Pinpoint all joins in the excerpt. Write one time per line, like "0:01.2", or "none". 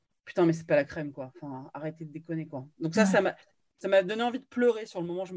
none